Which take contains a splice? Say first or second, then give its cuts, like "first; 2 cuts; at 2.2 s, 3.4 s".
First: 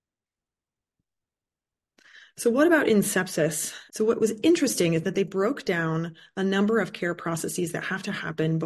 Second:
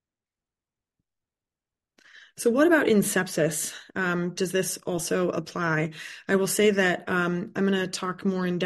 first; 1 cut; at 3.9 s